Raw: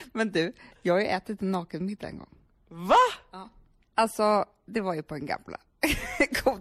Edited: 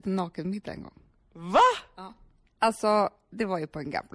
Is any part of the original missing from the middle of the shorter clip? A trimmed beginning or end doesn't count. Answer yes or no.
no